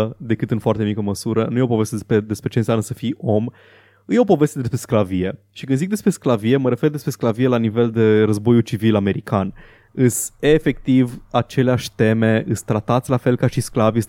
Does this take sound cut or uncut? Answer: uncut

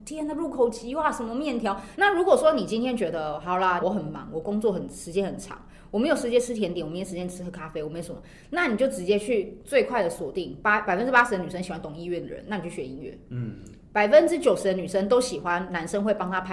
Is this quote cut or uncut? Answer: cut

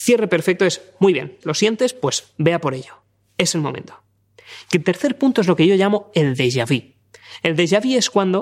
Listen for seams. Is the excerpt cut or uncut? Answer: cut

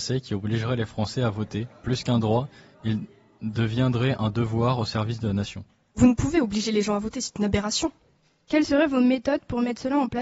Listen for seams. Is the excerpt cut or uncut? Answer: uncut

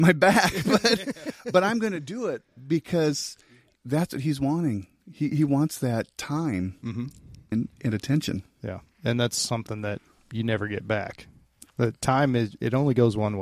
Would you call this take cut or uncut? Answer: cut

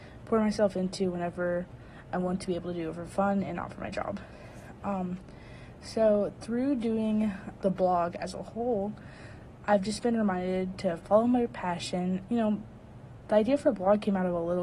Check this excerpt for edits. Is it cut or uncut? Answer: cut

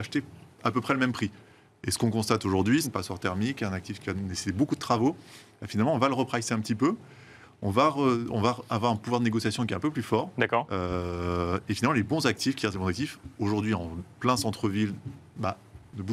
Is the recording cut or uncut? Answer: cut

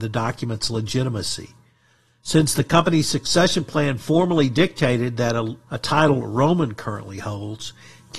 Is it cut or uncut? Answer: cut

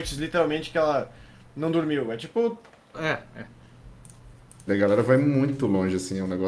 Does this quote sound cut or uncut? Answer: cut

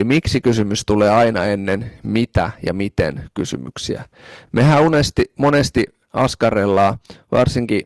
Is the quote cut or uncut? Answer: uncut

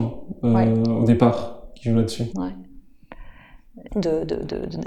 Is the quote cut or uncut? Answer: cut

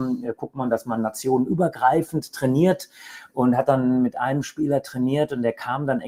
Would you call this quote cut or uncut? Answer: uncut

